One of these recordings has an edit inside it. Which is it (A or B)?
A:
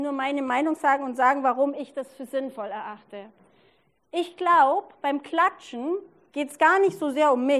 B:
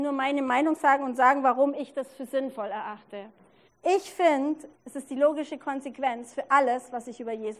B